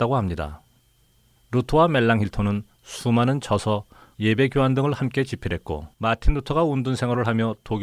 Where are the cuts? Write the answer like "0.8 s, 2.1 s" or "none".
4.1 s, 5.9 s